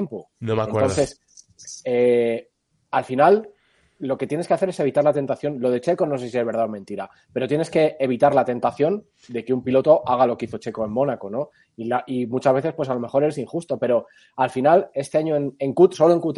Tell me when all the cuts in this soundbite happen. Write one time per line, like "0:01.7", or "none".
none